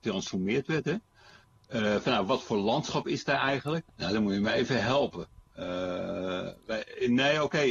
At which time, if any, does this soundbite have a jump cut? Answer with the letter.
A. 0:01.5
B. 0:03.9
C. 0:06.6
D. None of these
B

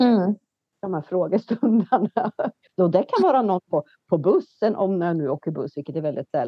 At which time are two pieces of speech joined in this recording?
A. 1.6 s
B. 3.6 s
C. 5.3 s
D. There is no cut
D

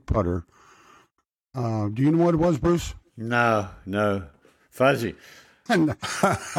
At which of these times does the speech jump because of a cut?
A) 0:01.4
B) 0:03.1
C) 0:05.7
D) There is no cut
C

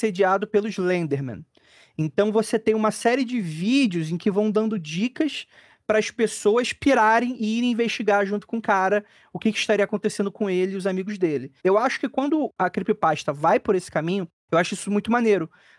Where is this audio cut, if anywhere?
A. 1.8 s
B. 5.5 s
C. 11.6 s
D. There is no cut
C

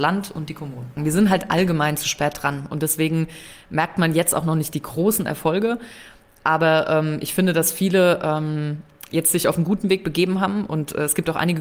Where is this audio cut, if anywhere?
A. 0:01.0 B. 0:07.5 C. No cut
A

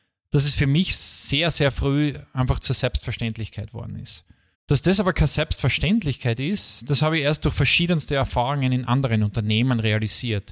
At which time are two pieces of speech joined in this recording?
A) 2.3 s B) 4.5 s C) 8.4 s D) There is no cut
B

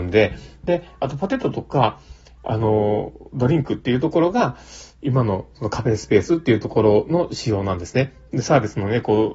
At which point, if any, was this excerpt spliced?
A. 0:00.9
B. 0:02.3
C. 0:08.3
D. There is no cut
C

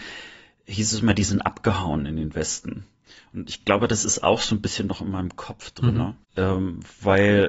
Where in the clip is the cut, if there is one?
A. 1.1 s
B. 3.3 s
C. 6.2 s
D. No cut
C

